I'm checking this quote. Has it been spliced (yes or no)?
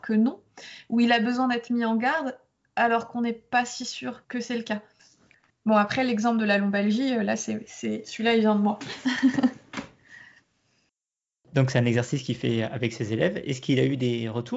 no